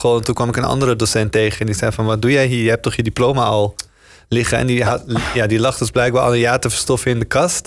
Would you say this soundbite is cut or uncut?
uncut